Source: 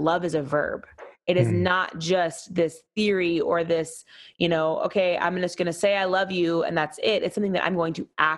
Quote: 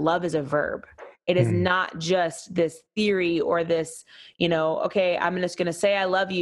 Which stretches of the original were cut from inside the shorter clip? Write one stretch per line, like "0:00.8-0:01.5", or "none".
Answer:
none